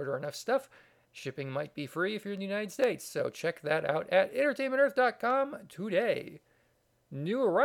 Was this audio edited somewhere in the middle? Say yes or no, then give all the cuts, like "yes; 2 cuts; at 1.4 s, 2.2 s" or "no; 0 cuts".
no; 0 cuts